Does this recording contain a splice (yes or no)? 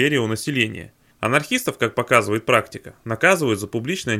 yes